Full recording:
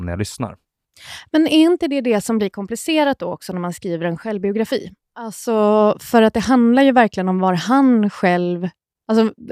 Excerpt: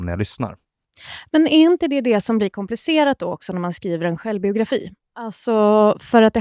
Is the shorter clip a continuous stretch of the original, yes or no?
yes